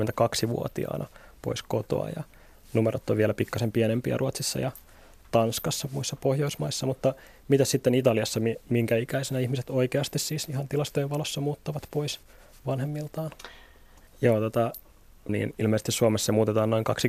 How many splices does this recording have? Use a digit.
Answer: 2